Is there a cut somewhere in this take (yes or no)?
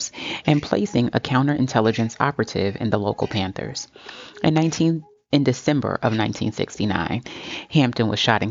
no